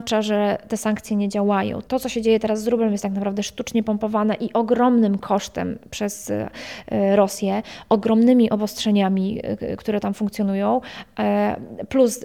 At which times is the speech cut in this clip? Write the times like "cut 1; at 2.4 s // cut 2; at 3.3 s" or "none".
none

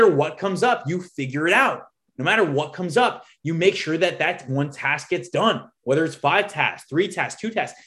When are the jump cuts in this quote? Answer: none

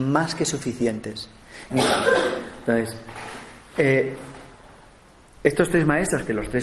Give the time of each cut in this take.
cut 1; at 1.7 s

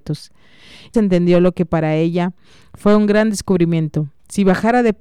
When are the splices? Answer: cut 1; at 0.9 s

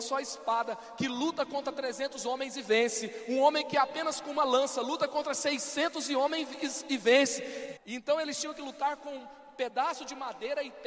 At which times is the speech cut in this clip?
cut 1; at 7.8 s

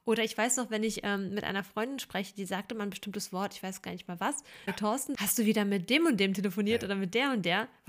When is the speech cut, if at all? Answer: cut 1; at 4.7 s

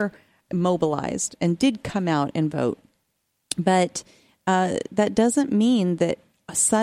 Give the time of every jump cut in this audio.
none

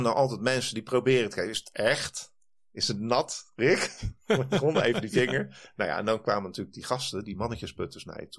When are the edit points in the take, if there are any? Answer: none

